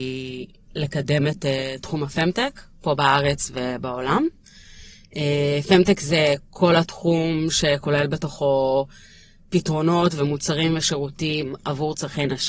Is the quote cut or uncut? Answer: uncut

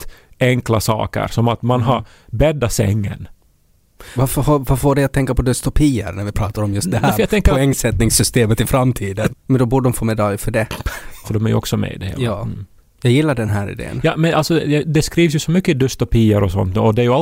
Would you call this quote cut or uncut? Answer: cut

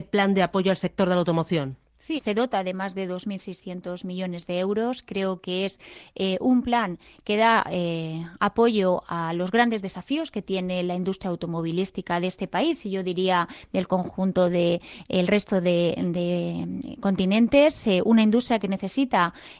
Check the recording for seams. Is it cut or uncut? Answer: cut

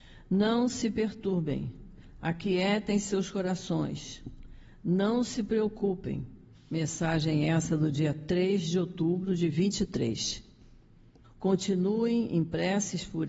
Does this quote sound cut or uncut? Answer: cut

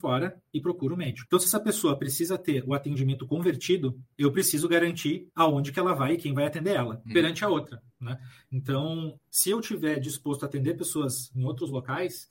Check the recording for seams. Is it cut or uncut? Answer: cut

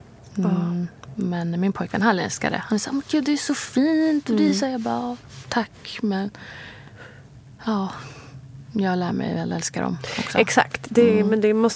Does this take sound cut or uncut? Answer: uncut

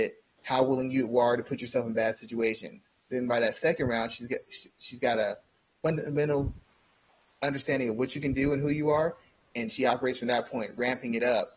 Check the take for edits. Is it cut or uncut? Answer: uncut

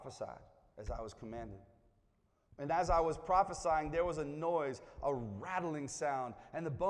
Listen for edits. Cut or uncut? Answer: uncut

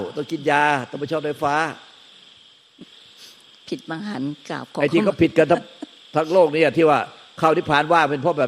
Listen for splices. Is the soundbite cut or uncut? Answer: uncut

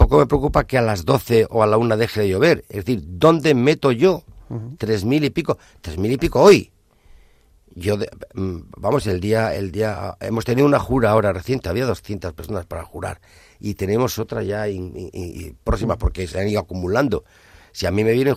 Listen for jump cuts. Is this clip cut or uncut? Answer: uncut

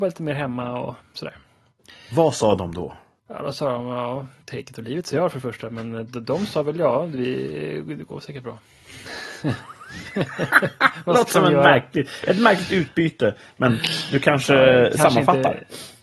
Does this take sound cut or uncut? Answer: uncut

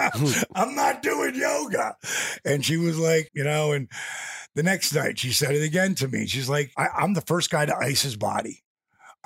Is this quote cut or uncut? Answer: cut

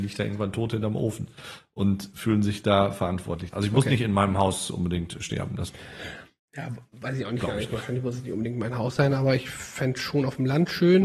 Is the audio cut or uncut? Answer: cut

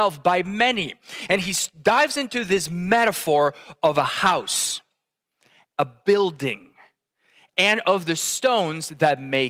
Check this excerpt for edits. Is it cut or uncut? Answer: uncut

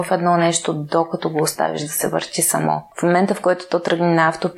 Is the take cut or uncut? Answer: cut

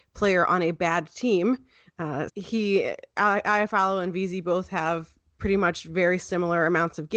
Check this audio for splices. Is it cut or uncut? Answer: cut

